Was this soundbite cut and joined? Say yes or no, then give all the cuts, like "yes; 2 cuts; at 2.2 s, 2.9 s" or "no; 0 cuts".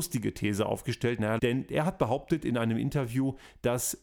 yes; 1 cut; at 1.4 s